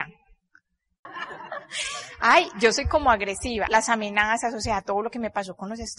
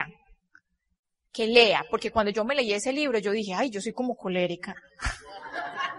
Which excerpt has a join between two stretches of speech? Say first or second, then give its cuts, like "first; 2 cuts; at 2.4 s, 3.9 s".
first; 2 cuts; at 1.1 s, 3.7 s